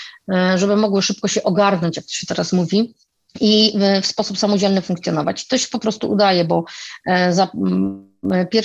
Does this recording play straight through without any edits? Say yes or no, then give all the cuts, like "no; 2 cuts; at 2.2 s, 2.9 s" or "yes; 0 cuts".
yes; 0 cuts